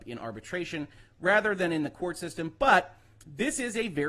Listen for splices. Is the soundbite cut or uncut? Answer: uncut